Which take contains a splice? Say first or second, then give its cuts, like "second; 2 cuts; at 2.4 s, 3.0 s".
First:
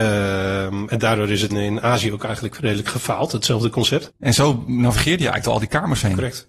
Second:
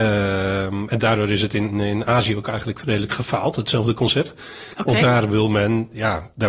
first; 2 cuts; at 1.5 s, 4.1 s